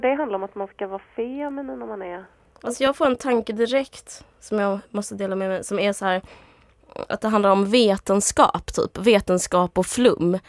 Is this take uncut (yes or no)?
yes